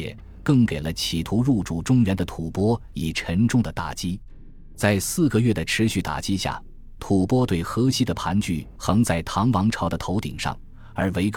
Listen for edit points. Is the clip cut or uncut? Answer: cut